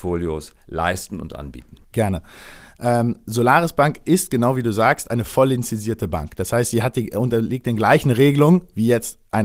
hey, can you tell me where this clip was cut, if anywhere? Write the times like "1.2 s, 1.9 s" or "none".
1.8 s